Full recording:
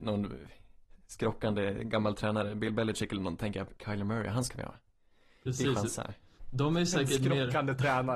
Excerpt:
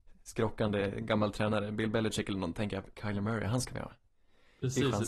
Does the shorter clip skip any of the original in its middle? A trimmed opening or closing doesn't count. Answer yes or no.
no